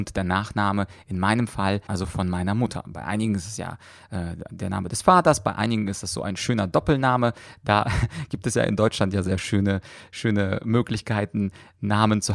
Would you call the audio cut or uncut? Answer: cut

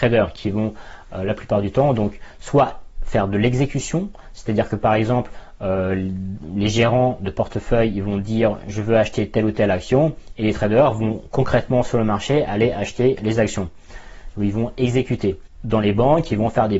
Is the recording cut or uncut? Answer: uncut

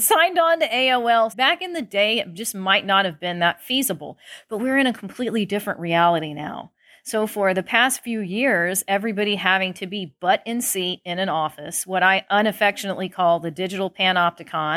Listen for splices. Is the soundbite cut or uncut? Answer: cut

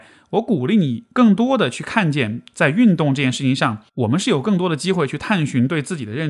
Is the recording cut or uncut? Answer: cut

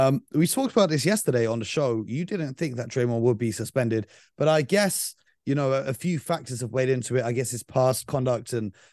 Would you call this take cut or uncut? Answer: uncut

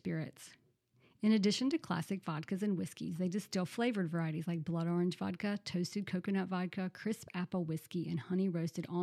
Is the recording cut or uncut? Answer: uncut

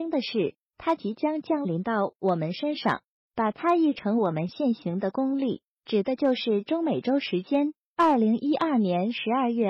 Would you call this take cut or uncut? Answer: uncut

